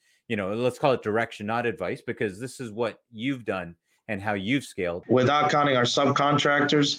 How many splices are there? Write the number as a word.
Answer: one